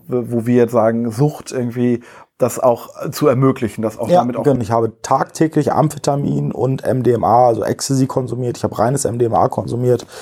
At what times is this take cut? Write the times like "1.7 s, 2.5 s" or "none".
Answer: 4.6 s